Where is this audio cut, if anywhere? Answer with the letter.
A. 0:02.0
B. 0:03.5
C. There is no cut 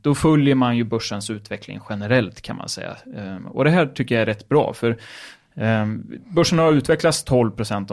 C